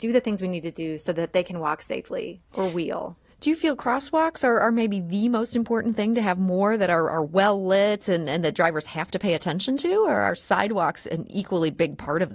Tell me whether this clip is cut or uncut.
uncut